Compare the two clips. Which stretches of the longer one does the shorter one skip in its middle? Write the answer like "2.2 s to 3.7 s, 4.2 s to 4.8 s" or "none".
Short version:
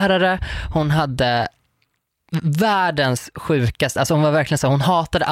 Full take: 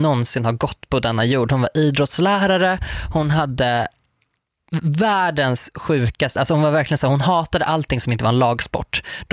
none